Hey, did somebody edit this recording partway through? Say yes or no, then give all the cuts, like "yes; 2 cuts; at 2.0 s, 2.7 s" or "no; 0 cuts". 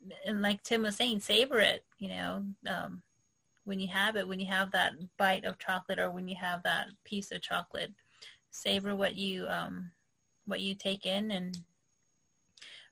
no; 0 cuts